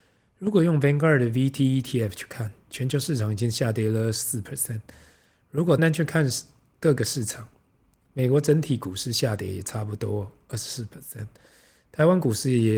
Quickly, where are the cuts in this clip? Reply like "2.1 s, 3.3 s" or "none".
5.8 s